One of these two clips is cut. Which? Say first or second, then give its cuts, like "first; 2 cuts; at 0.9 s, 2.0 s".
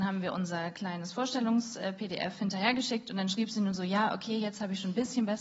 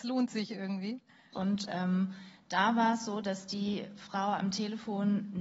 second; 1 cut; at 1.3 s